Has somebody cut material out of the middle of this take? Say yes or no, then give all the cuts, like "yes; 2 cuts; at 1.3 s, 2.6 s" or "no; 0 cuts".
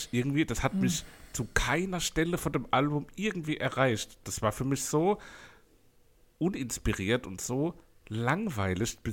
no; 0 cuts